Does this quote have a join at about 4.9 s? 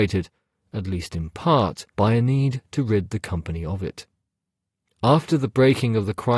no; 1 cut; at 1.9 s

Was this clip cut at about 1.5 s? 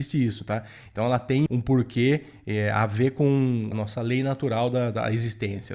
yes; 2 cuts; at 1.5 s, 3.7 s

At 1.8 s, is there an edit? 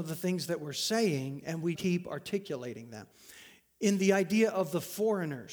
yes; 1 cut; at 1.8 s

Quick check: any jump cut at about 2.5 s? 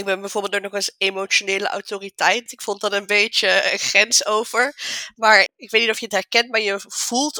yes; 2 cuts; at 2.5 s, 5.5 s

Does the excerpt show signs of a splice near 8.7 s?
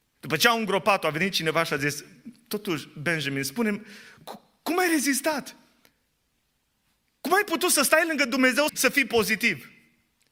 yes; 1 cut; at 8.7 s

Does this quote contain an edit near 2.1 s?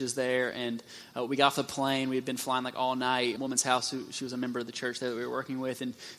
no; 1 cut; at 3.4 s

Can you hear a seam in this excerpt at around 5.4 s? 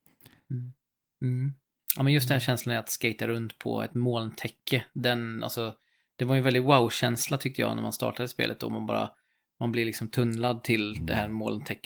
no; 1 cut; at 1.1 s

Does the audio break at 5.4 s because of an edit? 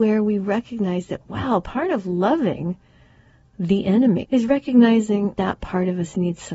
yes; 2 cuts; at 4.2 s, 5.4 s

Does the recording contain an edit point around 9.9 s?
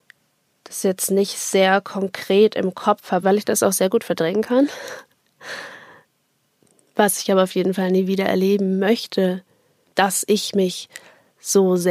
yes; 2 cuts; at 3.2 s, 9.9 s

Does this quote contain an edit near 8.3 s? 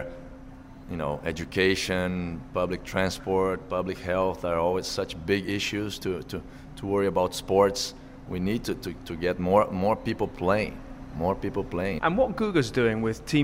yes; 2 cuts; at 8.3 s, 12.0 s

